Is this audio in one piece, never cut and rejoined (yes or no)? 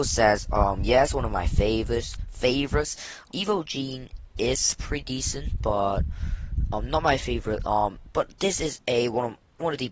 no